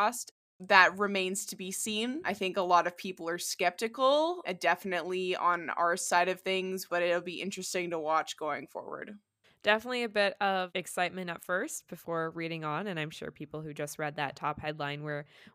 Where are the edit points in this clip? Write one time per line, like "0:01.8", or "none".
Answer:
0:06.9